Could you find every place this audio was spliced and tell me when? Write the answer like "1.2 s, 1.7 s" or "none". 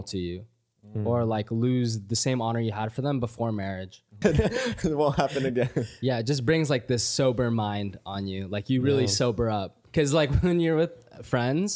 4.2 s